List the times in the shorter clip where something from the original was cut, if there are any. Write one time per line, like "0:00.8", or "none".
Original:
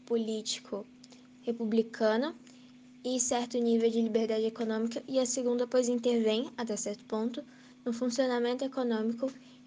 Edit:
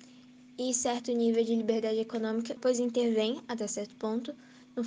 0:02.6

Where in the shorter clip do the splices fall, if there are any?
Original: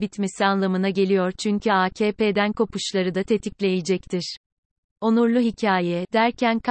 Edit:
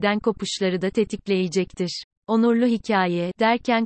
0:02.1

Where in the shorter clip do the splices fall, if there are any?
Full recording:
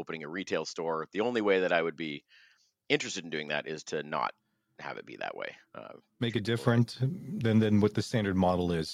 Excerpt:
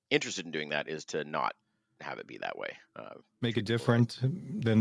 none

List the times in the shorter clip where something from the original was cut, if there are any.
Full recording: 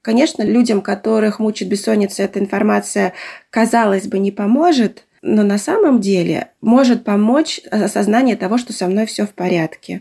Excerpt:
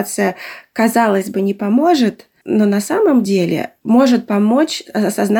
none

